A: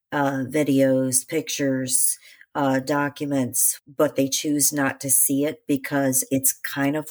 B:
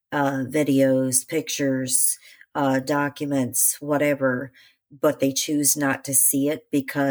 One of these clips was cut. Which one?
A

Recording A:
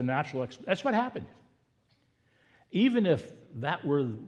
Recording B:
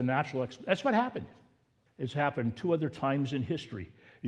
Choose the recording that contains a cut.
B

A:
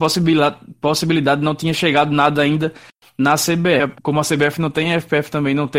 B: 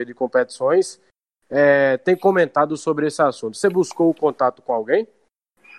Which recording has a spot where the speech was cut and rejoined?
A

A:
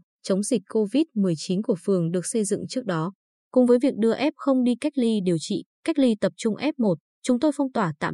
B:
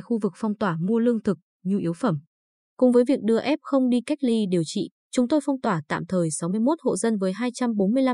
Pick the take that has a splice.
B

